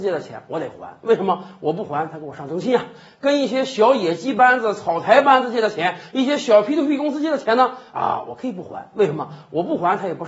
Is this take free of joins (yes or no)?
yes